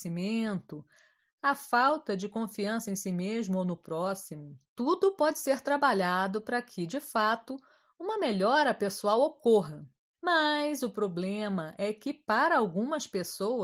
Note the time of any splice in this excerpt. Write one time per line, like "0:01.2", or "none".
0:01.2
0:04.6
0:10.1